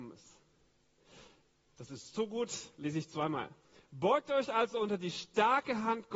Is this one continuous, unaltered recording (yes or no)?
yes